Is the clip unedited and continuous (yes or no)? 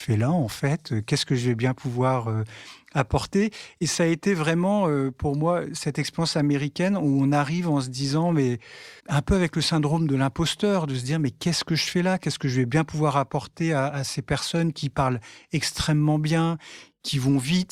no